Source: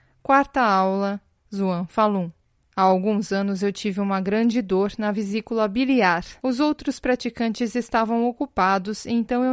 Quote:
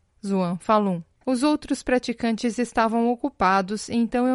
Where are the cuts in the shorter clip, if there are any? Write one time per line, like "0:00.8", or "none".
0:01.2